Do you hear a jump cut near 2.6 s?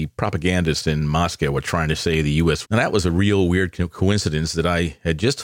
yes; 1 cut; at 2.6 s

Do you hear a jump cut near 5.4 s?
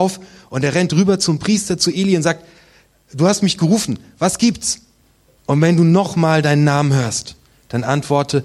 yes; 1 cut; at 5.4 s

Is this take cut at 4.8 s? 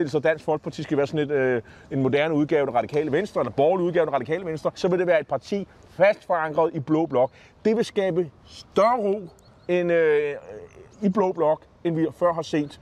yes; 1 cut; at 4.8 s

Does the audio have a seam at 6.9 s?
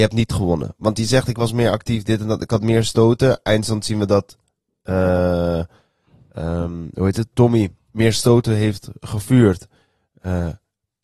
no; 0 cuts

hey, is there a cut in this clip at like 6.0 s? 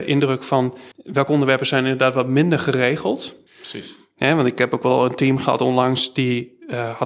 no; 2 cuts; at 0.9 s, 3.5 s

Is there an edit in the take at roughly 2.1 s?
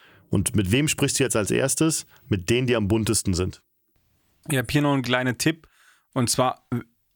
no; 1 cut; at 4.4 s

